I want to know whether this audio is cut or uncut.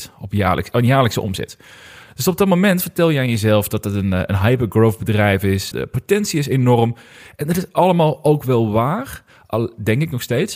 cut